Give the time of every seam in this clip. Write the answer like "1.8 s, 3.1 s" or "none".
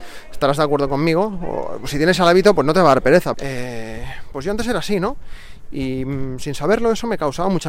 3.3 s

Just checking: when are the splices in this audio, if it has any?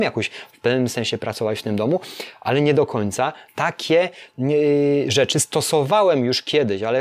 3.5 s

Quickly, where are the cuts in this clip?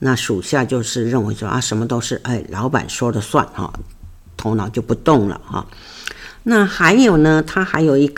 none

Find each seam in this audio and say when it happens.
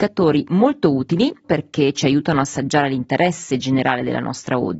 1.4 s

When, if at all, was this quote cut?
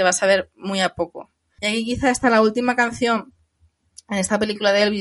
1.6 s

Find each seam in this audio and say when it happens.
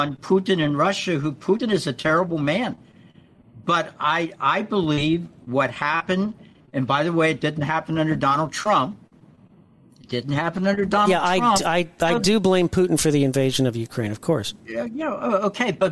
none

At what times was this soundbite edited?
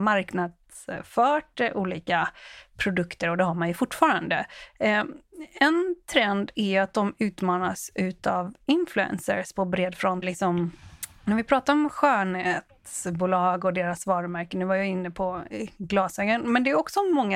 4.7 s, 10.2 s

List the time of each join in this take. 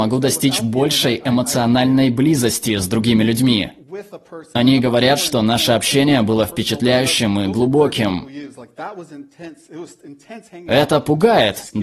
none

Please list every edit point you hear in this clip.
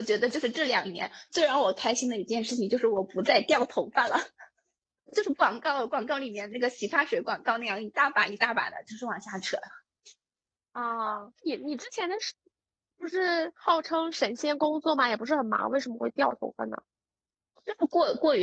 11.4 s

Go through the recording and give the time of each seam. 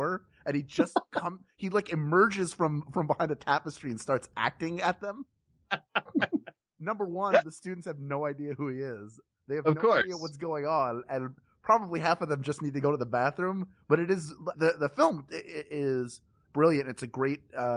14.5 s

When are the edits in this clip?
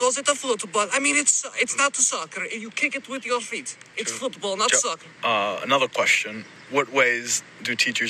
5.2 s

